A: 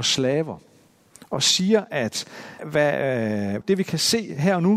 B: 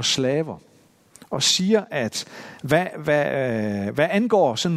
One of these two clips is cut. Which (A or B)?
A